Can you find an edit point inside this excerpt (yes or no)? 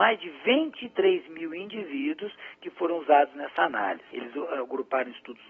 no